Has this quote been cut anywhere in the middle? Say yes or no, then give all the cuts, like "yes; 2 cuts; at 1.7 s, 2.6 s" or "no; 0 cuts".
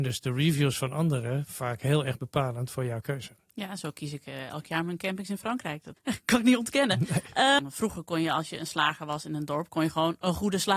yes; 2 cuts; at 6.0 s, 7.6 s